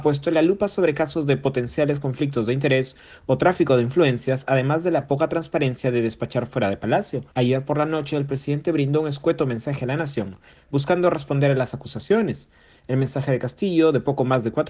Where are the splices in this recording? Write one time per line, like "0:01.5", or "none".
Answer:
0:07.3